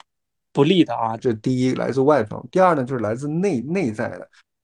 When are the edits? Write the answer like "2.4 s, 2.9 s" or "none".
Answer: 1.2 s